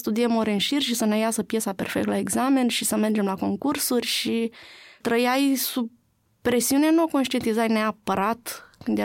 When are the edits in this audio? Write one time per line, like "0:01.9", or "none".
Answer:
0:05.0